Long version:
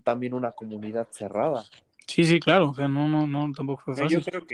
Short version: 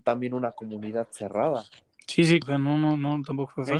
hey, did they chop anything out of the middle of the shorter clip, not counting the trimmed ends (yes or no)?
yes